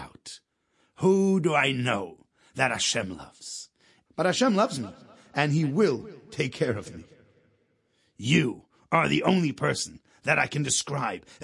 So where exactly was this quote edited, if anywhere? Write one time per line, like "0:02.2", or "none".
0:04.1